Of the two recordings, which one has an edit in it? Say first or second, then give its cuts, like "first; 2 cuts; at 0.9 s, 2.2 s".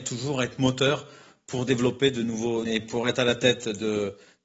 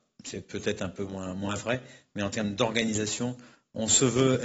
first; 1 cut; at 2.6 s